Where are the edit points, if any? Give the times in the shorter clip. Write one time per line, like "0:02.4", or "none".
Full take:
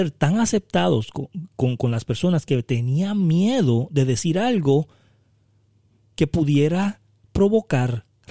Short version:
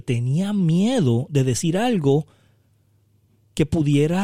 none